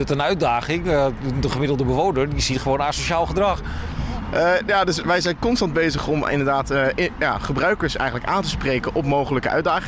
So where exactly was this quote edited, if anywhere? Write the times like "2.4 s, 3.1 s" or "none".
none

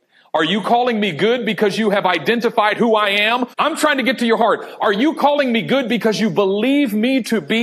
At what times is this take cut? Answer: 3.5 s

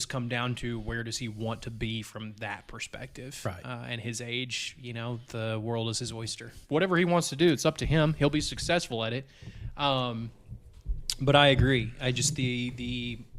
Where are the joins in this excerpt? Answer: 6.6 s

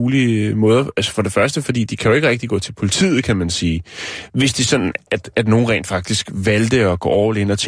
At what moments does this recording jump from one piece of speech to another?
none

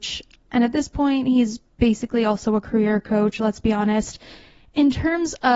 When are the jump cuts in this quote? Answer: none

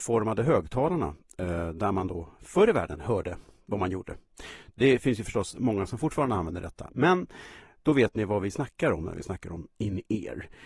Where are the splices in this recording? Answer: none

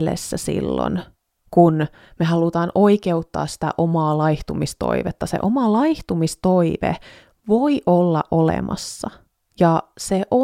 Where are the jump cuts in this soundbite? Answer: none

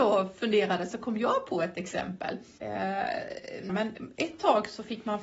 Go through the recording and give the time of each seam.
3.7 s

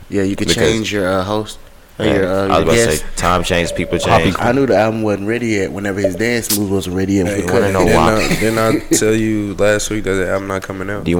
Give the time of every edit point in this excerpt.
4.4 s, 7.2 s

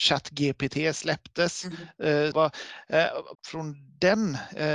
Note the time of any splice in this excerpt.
2.3 s, 3.3 s

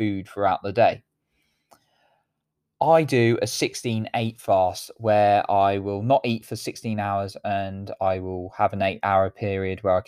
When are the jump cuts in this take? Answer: none

